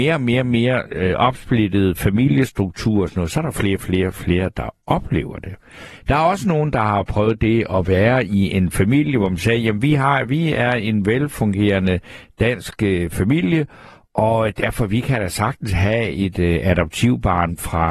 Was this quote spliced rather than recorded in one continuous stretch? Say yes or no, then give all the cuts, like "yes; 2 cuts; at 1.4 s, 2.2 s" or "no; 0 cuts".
no; 0 cuts